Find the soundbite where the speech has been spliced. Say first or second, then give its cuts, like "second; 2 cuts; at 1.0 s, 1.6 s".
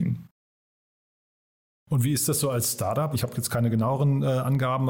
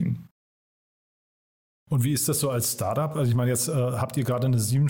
first; 1 cut; at 3.1 s